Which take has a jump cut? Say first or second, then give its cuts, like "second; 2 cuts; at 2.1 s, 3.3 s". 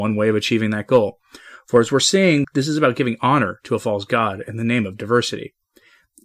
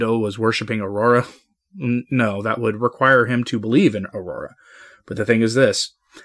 first; 1 cut; at 2.4 s